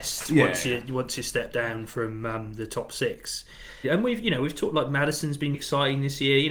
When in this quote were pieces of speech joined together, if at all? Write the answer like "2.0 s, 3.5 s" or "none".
3.8 s, 5.5 s